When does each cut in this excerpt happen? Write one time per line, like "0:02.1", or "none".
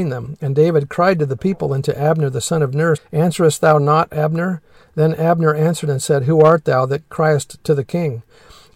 0:03.0